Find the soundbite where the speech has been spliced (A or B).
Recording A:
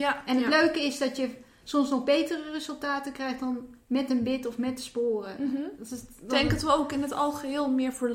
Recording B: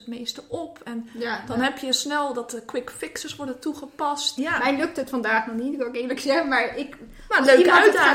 B